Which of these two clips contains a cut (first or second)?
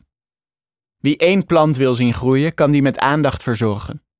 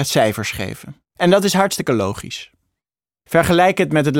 second